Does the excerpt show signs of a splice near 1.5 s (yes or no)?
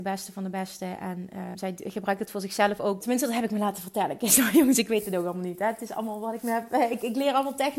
yes